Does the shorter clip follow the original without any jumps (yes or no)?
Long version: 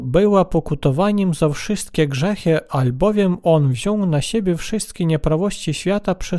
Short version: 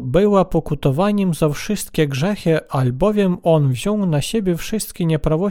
yes